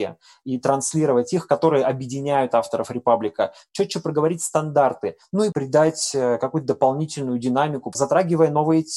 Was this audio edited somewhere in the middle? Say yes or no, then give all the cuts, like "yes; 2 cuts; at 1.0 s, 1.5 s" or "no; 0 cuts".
yes; 2 cuts; at 5.5 s, 7.9 s